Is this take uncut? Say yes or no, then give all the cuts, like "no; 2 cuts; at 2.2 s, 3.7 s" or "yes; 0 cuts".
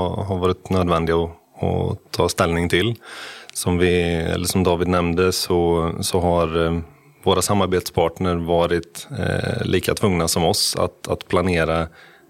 yes; 0 cuts